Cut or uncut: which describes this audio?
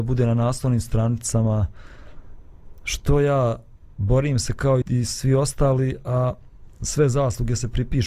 cut